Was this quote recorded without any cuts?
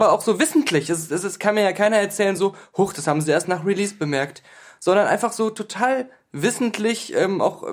yes; 0 cuts

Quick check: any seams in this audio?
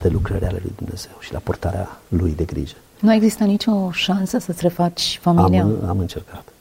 no; 0 cuts

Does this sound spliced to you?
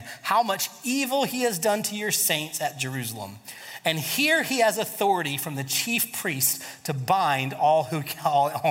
no; 0 cuts

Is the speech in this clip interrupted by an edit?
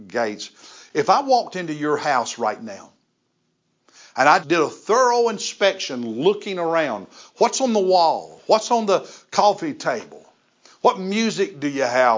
yes; 1 cut; at 4.4 s

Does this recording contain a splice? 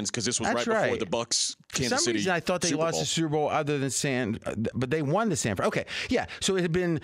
yes; 1 cut; at 4.7 s

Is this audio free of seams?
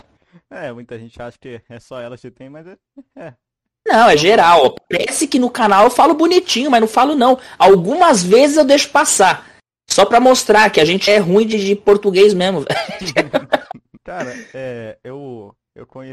no; 2 cuts; at 11.1 s, 14.0 s

